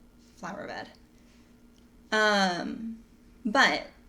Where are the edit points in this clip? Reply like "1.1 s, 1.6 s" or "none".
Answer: 1.9 s